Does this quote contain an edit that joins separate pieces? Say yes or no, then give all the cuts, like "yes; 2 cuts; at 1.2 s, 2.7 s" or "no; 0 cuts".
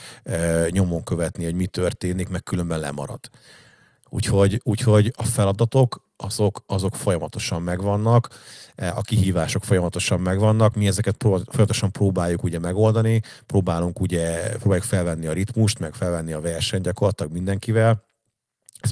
no; 0 cuts